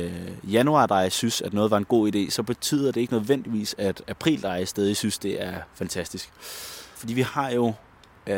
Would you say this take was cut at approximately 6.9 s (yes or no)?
yes